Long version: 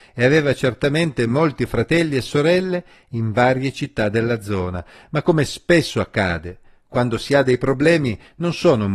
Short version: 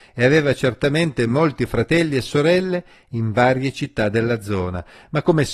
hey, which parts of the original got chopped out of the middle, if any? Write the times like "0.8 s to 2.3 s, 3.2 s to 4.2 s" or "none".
none